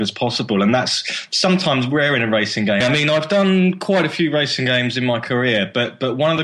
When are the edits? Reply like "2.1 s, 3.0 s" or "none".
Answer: 2.8 s